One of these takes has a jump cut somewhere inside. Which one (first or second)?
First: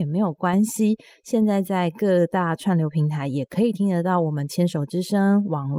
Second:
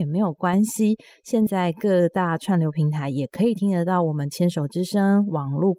second